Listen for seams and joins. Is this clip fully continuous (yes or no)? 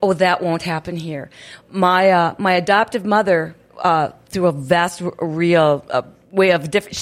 yes